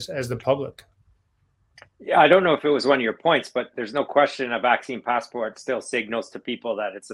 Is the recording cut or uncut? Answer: uncut